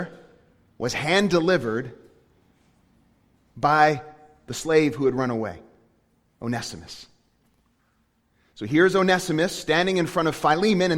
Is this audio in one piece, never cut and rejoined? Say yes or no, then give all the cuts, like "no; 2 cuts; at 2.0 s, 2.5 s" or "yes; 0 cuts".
yes; 0 cuts